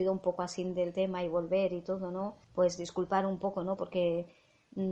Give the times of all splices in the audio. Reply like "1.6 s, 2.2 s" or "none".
2.4 s, 3.8 s